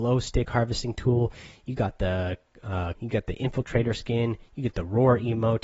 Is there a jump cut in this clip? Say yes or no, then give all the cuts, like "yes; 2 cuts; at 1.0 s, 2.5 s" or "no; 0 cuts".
yes; 1 cut; at 2.9 s